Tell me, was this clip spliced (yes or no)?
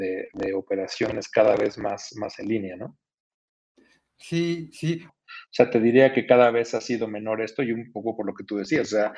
yes